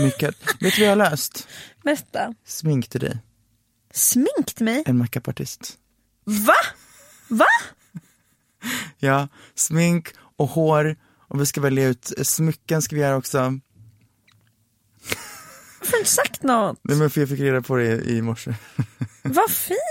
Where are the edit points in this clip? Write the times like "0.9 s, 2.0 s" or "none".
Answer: none